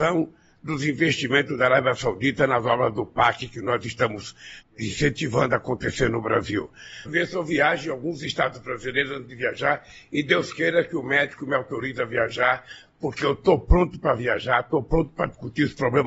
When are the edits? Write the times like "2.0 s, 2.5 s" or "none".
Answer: 4.6 s, 7.1 s